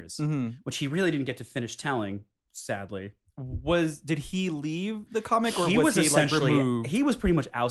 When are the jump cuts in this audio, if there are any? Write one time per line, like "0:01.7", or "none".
none